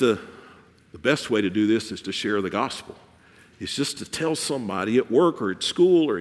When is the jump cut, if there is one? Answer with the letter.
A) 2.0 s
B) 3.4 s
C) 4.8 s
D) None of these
A